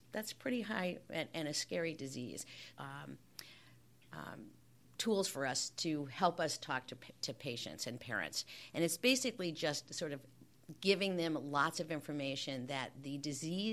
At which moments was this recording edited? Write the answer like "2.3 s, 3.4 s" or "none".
2.7 s